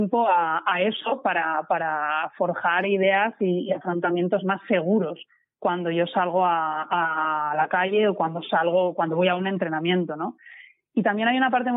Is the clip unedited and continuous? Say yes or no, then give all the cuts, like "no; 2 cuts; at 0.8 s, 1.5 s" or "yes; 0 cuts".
yes; 0 cuts